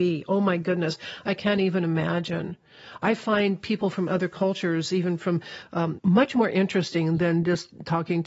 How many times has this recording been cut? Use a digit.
1